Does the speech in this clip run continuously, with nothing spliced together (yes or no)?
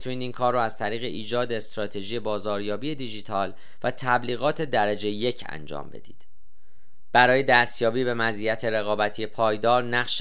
yes